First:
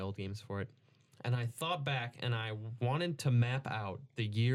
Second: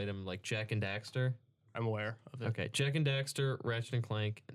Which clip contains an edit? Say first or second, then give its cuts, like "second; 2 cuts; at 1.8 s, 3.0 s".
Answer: second; 1 cut; at 1.7 s